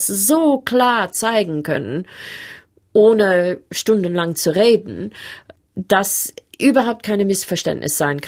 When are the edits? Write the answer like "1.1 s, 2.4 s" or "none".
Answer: none